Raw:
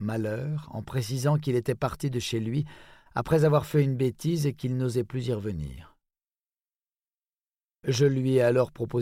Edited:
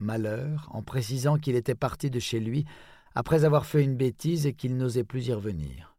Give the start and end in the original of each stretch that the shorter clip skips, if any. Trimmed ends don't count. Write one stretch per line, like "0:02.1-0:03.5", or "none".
none